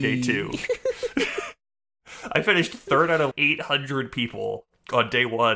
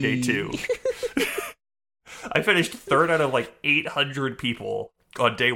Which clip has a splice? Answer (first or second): first